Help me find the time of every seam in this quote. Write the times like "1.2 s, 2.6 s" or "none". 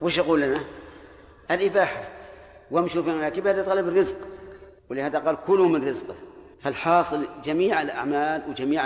1.5 s, 4.8 s, 6.5 s